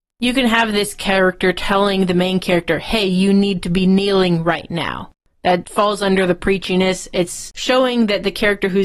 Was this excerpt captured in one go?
yes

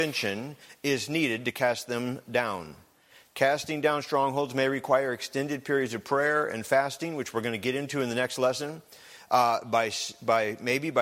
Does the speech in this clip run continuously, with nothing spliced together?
yes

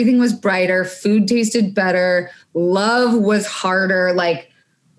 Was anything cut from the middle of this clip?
no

